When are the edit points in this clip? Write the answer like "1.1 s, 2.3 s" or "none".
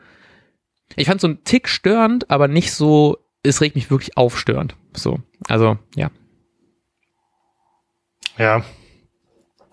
none